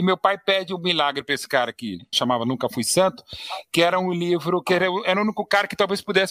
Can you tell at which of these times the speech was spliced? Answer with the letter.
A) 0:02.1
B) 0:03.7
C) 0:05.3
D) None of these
A